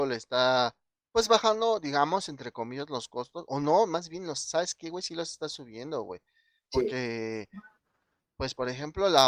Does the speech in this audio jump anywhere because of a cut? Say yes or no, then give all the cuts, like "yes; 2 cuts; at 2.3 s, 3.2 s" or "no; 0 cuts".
no; 0 cuts